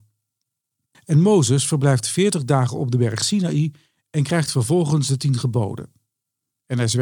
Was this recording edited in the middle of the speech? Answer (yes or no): yes